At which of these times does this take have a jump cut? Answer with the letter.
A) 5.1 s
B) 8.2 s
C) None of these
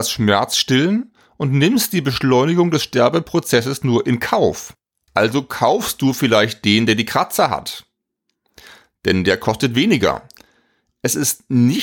A